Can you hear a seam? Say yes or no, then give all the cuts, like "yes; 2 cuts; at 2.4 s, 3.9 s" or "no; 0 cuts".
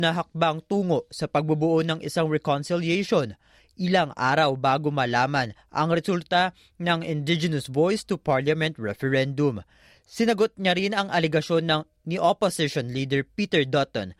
no; 0 cuts